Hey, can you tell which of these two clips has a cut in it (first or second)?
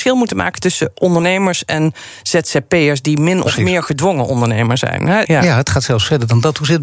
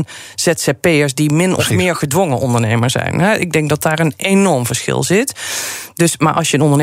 first